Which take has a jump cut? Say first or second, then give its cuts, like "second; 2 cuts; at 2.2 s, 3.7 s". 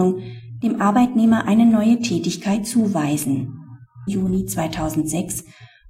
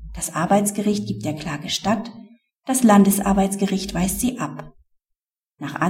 first; 1 cut; at 4.1 s